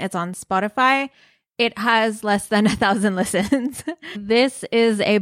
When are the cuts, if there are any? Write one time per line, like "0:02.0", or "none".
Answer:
0:04.1